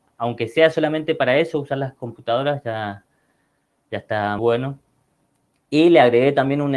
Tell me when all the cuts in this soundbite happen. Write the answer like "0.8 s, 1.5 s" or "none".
4.4 s